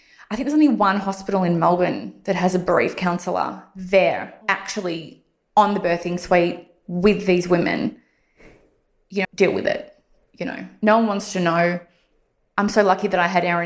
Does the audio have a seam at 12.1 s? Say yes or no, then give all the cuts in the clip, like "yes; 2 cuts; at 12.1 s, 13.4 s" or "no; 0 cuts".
no; 1 cut; at 9.2 s